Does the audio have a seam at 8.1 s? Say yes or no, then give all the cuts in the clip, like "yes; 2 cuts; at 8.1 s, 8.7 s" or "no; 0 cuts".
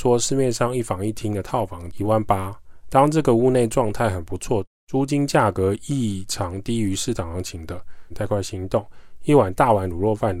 yes; 2 cuts; at 2.8 s, 8.1 s